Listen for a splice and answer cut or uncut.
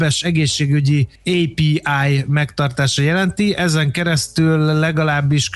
cut